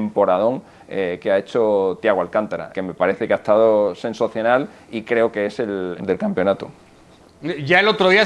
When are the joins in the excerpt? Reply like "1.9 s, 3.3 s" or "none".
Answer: 2.7 s, 6.0 s